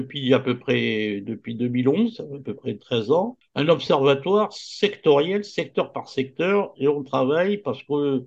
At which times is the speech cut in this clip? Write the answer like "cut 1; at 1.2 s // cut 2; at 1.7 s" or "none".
none